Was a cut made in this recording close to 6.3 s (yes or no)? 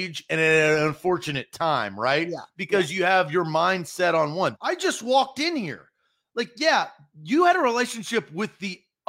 no